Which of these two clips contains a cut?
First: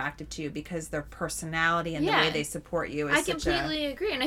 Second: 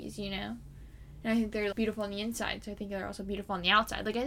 second; 1 cut; at 1.7 s

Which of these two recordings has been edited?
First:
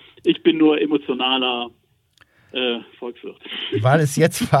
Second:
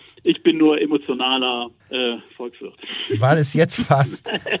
second; 1 cut; at 1.8 s

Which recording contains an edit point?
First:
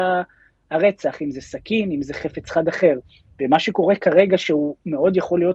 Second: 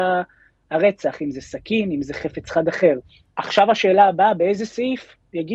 second; 1 cut; at 3.2 s

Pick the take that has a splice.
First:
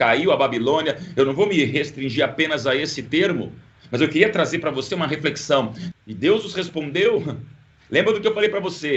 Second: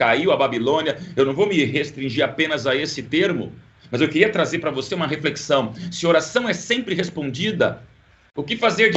first; 1 cut; at 5.9 s

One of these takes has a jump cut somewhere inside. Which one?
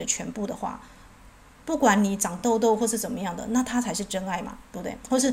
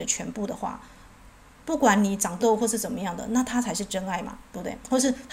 second; 1 cut; at 2.4 s

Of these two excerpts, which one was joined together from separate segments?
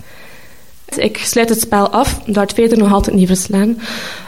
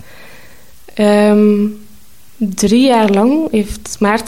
first; 1 cut; at 0.9 s

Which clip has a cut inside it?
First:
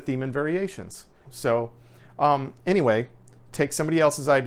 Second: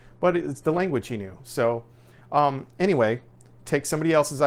first; 1 cut; at 1.2 s

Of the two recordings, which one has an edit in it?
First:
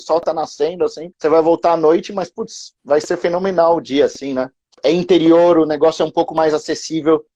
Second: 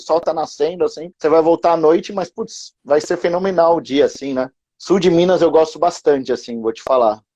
first; 1 cut; at 4.7 s

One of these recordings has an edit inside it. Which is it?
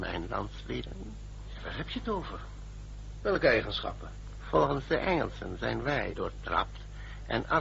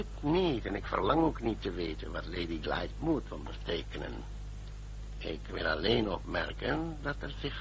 first; 1 cut; at 6.1 s

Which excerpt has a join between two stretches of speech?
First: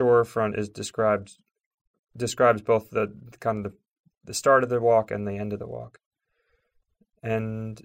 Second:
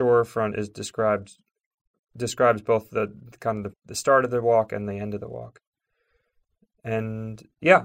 second; 1 cut; at 3.7 s

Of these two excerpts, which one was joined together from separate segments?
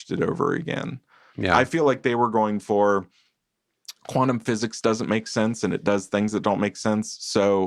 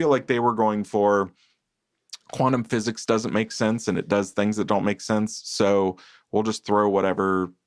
first; 1 cut; at 1.3 s

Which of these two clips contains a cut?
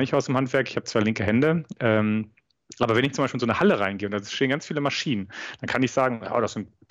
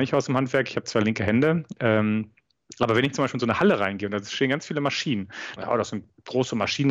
second; 1 cut; at 5.6 s

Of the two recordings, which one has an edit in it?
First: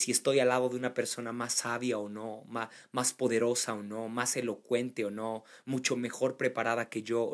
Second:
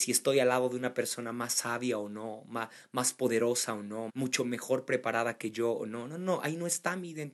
second; 1 cut; at 4.1 s

